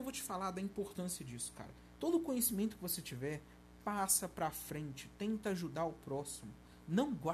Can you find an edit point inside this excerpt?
no; 0 cuts

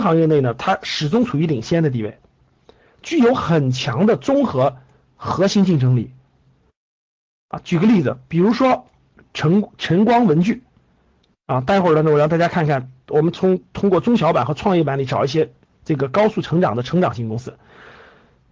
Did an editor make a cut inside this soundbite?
no; 0 cuts

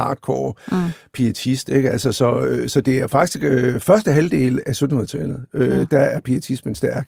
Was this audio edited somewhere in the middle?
no; 0 cuts

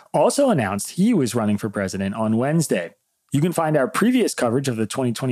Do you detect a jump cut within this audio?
no; 0 cuts

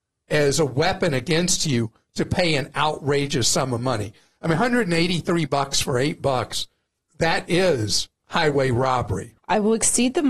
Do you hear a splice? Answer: yes; 1 cut; at 9.4 s

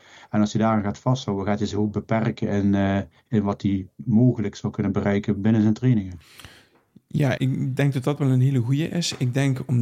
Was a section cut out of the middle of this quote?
yes; 2 cuts; at 5.4 s, 7.4 s

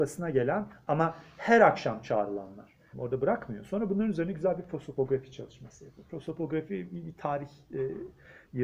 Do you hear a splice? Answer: yes; 1 cut; at 2.9 s

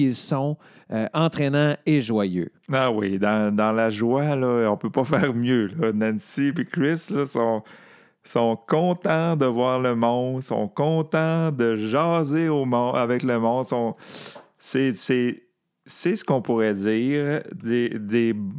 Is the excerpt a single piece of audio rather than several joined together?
yes; 0 cuts

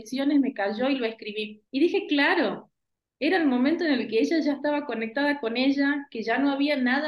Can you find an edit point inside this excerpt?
yes; 1 cut; at 1.7 s

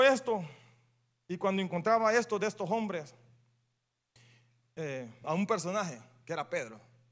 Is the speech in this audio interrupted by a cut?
yes; 1 cut; at 5.2 s

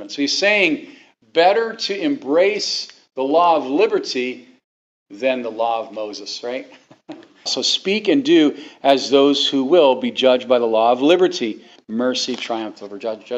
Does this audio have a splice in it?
yes; 2 cuts; at 7.5 s, 11.8 s

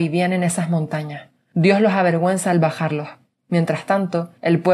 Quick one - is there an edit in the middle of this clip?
no; 0 cuts

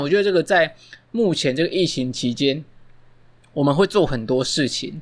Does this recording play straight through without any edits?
yes; 0 cuts

